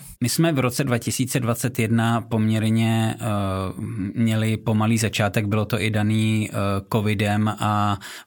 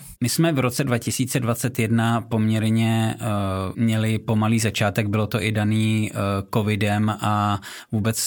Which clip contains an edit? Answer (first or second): second